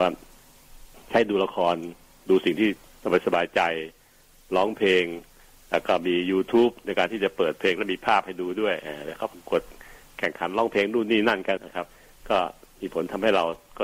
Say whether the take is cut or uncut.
cut